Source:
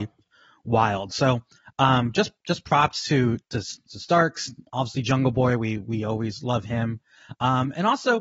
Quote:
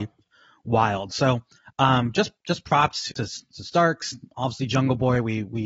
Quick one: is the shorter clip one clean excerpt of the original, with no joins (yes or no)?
no